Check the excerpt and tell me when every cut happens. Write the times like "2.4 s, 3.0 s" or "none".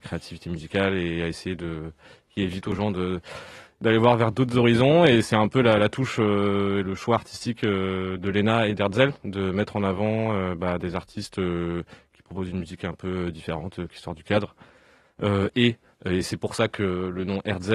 none